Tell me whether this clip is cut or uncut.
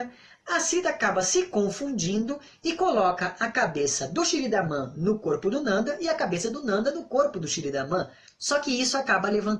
cut